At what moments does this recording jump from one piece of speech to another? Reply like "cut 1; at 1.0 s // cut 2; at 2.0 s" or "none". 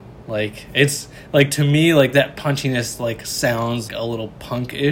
cut 1; at 3.9 s